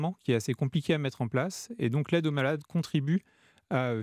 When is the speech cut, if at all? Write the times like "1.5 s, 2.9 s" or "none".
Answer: none

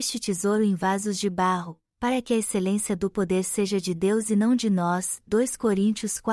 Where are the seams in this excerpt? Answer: none

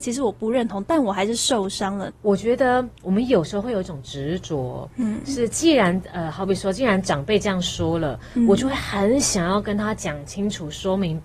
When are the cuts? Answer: 2.1 s

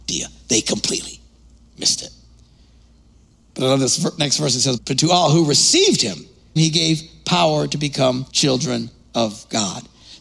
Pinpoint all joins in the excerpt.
4.8 s, 6.6 s, 8.3 s

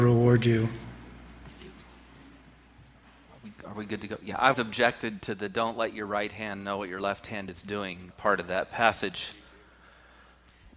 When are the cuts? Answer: 4.5 s, 8.1 s

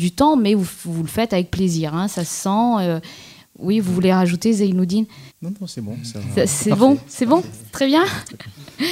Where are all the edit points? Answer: 5.3 s

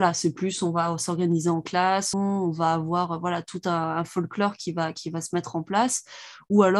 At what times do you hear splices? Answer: 2.1 s

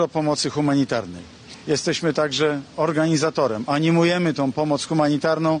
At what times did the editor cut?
none

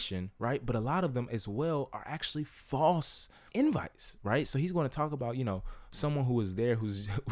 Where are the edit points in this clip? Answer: 3.5 s

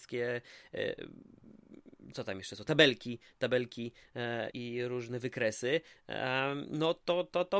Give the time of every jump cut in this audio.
4.5 s

